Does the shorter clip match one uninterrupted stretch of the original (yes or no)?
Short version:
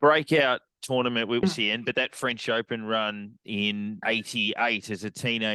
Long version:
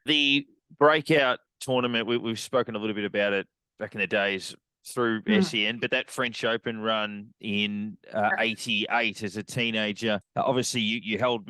no